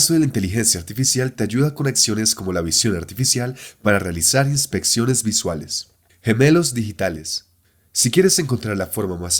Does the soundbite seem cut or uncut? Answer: cut